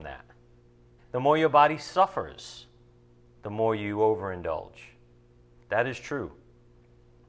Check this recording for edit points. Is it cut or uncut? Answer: cut